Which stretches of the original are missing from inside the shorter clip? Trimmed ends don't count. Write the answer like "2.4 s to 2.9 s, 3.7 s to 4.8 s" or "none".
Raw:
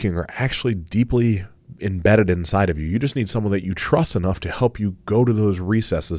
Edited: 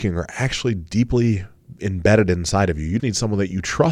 3.0 s to 3.1 s